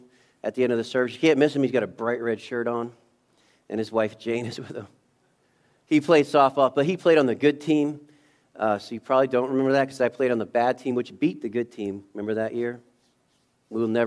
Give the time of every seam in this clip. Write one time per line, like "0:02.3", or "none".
none